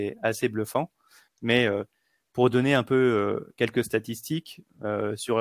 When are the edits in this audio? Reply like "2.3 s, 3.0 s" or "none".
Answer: 1.3 s